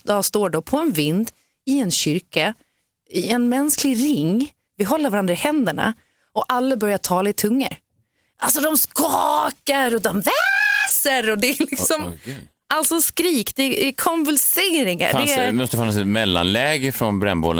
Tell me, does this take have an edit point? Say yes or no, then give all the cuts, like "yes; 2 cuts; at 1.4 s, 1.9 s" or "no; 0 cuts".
no; 0 cuts